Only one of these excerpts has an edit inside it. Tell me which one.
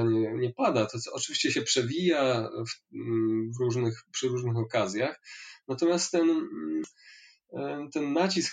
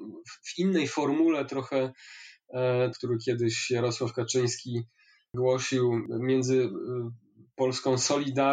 second; 1 cut; at 2.9 s

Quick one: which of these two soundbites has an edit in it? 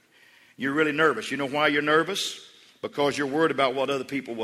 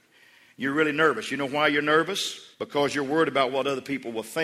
second; 1 cut; at 2.5 s

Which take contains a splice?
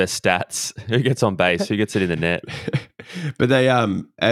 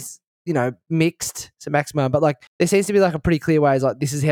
second; 1 cut; at 2.5 s

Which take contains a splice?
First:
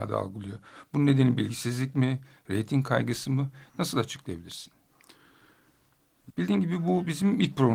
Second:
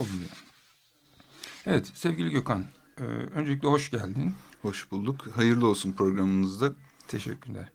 first; 1 cut; at 6.3 s

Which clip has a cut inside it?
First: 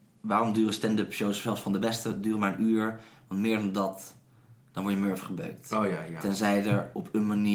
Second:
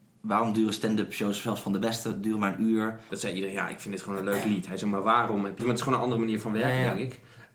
second; 2 cuts; at 3.1 s, 5.6 s

